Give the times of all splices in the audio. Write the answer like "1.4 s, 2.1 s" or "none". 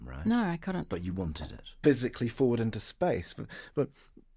1.8 s